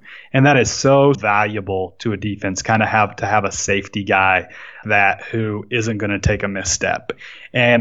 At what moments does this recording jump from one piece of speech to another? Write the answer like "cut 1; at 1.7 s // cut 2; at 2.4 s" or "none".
cut 1; at 1.1 s // cut 2; at 4.8 s